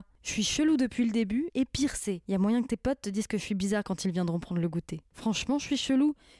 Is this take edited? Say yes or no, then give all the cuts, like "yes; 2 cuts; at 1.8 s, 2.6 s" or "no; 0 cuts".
yes; 2 cuts; at 1.5 s, 5.1 s